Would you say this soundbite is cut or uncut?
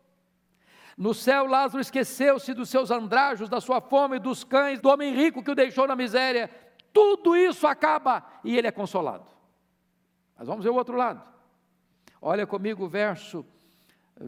cut